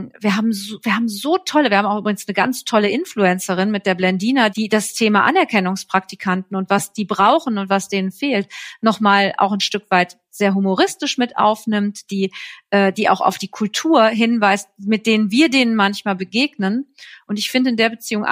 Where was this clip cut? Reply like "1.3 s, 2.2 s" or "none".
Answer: 4.5 s